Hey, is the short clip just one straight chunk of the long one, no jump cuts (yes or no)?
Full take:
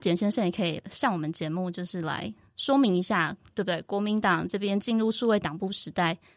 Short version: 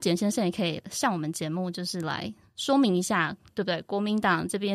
yes